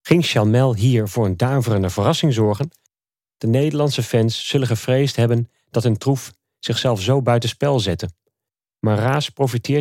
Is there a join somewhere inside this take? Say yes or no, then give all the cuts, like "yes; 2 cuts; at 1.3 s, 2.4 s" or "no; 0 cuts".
yes; 1 cut; at 3.3 s